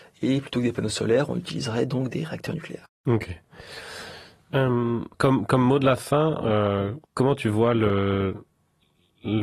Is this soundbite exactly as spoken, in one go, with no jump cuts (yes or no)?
no